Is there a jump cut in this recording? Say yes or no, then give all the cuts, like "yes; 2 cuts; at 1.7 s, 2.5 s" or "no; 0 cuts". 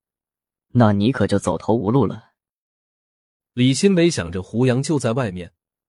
no; 0 cuts